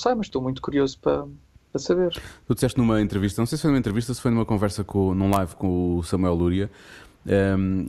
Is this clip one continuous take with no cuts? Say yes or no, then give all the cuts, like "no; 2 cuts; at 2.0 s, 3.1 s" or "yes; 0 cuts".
yes; 0 cuts